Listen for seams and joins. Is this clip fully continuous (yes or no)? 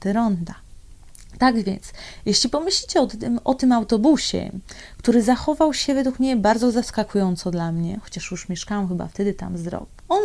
yes